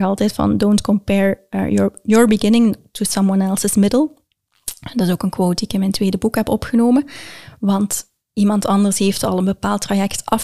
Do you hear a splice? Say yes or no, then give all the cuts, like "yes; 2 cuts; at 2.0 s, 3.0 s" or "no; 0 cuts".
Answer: no; 0 cuts